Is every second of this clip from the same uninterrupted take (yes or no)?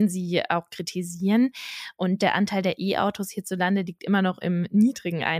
yes